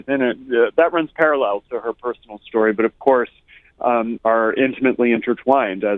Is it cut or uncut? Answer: cut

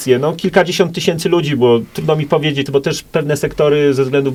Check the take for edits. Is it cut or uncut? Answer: cut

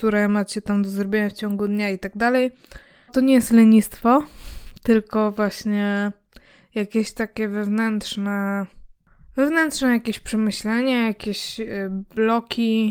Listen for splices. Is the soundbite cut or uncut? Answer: cut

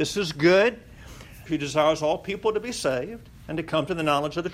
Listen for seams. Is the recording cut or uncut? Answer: cut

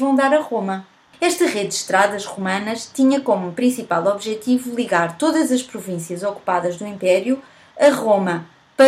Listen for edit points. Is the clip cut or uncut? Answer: cut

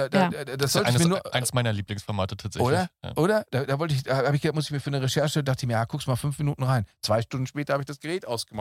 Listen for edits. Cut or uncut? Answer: uncut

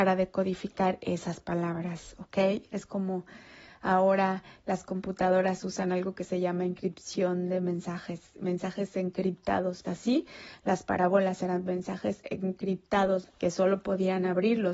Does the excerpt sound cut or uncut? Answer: cut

